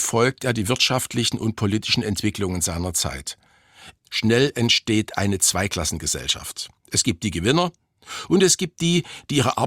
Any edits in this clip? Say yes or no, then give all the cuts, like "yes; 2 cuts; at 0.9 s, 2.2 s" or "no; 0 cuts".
yes; 1 cut; at 4.0 s